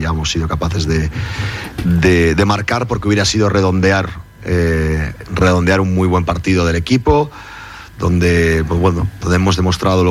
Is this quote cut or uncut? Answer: uncut